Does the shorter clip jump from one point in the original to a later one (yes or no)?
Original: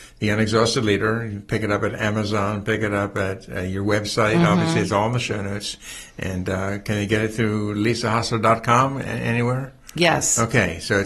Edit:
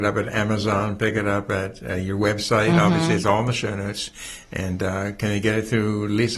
no